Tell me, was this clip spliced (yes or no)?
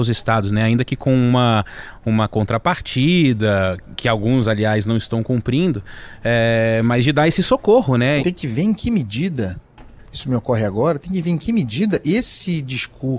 yes